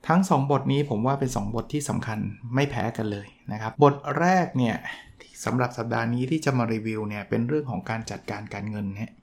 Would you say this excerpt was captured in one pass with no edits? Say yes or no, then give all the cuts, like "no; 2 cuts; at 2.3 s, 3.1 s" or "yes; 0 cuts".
no; 1 cut; at 3.7 s